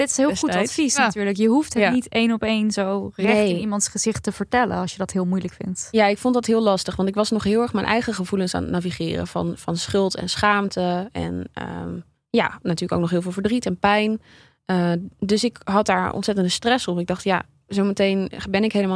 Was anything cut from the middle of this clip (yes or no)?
no